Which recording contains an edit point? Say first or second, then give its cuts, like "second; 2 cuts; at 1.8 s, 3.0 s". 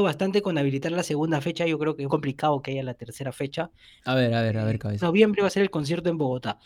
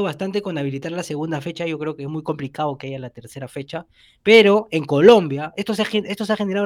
first; 3 cuts; at 2.1 s, 4.0 s, 5.0 s